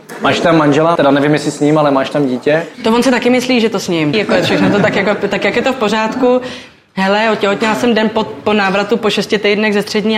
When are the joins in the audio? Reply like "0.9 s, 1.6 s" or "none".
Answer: 1.0 s, 4.1 s

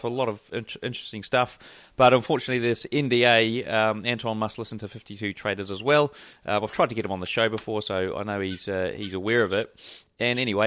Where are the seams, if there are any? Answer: none

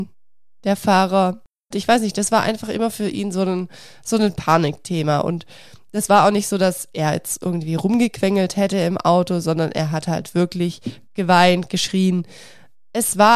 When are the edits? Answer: 1.7 s

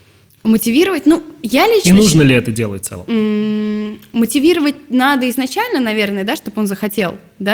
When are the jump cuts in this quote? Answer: none

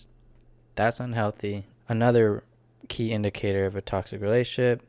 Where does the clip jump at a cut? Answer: 1.7 s

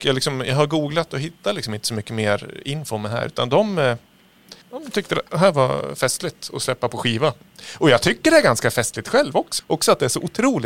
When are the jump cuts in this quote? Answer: 4.6 s, 9.6 s

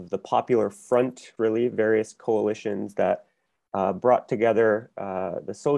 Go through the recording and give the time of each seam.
1.4 s

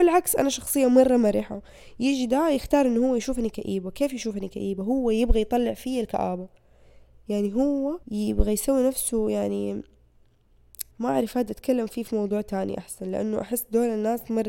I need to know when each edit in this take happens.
8.0 s, 10.9 s

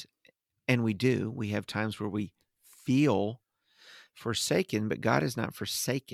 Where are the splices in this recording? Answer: none

